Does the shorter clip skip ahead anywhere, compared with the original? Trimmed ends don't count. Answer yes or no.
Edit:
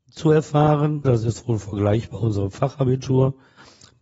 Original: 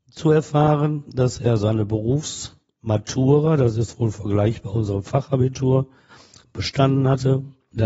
yes